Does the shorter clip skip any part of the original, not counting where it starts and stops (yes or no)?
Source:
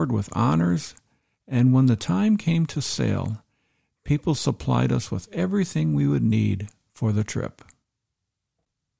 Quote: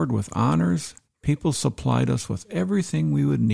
yes